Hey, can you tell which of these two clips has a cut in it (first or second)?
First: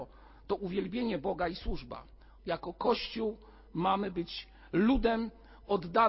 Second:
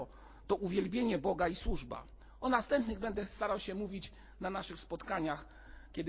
first